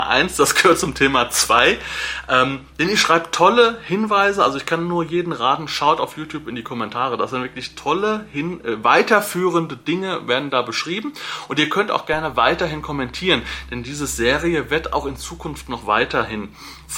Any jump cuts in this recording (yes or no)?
no